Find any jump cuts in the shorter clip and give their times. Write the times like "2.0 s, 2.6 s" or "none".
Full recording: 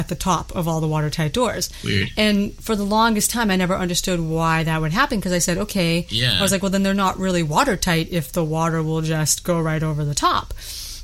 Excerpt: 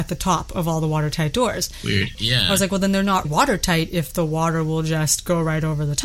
2.1 s, 3.2 s